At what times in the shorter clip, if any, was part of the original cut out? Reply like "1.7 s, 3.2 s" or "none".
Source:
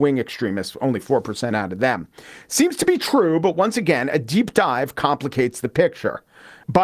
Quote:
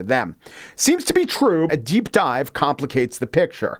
1.7 s